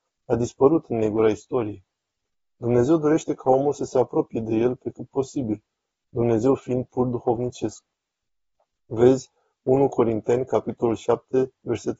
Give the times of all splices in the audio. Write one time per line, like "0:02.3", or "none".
none